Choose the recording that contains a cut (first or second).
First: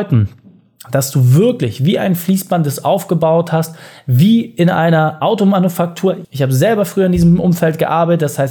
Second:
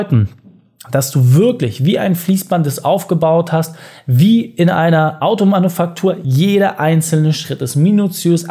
first